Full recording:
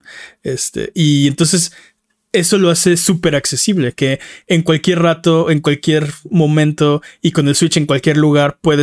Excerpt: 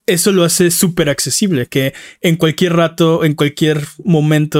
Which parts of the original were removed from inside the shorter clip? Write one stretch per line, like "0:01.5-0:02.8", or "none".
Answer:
none